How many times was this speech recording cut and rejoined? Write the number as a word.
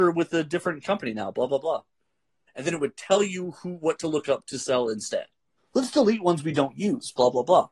two